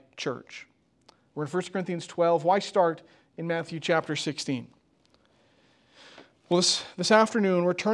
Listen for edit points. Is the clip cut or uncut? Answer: cut